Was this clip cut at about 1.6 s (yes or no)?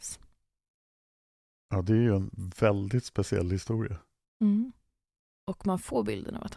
no